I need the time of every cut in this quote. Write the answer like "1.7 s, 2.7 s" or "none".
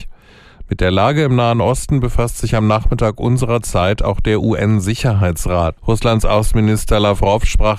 5.8 s